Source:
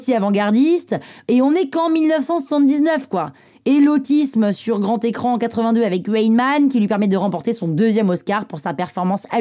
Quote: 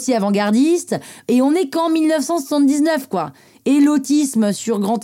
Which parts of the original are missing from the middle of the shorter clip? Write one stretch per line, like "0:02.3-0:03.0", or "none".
none

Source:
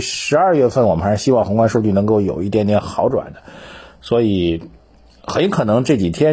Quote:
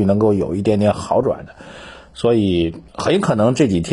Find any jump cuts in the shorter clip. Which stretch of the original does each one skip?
0:04.8-0:05.2

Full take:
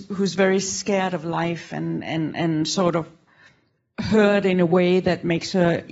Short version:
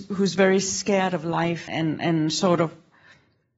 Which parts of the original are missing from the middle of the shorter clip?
0:01.7-0:02.0

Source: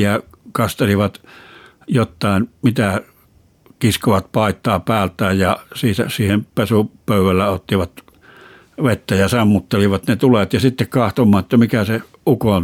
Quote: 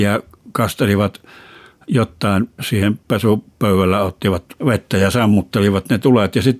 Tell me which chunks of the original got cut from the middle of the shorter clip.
0:02.6-0:06.1
0:08.0-0:08.7

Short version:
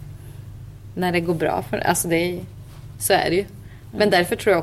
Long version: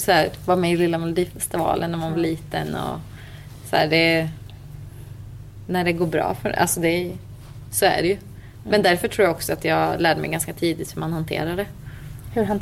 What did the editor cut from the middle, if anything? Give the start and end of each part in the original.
none

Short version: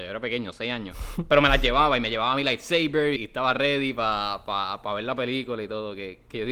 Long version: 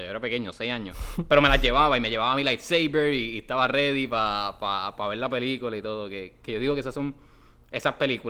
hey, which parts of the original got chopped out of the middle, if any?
0:03.2-0:03.3

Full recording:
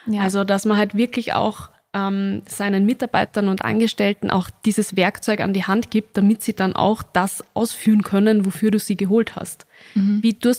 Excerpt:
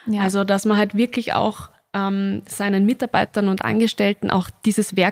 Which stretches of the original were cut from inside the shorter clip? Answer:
none

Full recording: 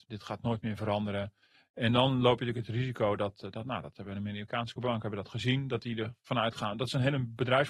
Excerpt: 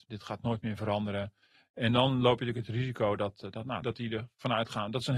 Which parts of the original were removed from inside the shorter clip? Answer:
0:03.8-0:05.7

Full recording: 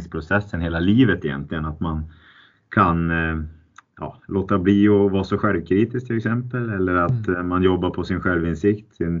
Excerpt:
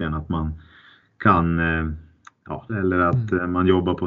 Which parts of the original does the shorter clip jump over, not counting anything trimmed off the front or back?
0:04.2-0:06.7

